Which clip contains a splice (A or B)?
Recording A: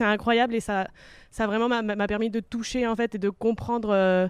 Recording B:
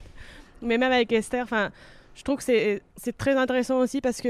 B